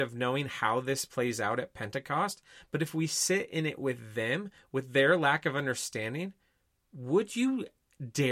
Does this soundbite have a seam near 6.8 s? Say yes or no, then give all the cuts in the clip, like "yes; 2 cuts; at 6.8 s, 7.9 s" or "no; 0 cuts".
no; 0 cuts